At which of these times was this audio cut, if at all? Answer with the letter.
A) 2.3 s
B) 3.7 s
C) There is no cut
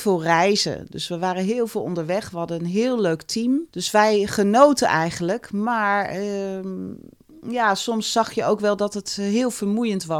B